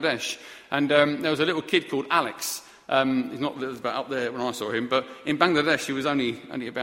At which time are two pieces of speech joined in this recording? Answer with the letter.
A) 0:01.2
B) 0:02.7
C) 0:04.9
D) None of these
D